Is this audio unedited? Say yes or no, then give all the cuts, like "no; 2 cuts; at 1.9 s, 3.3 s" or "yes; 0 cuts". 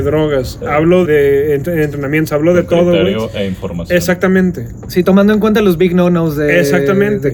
no; 1 cut; at 1.0 s